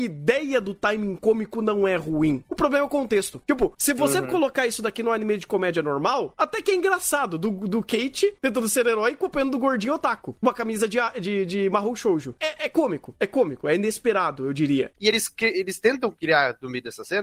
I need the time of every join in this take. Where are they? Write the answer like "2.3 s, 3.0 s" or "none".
12.4 s, 14.9 s